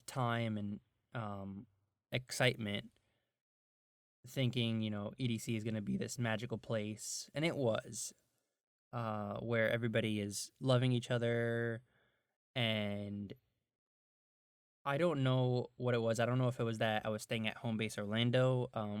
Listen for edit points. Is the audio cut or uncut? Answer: uncut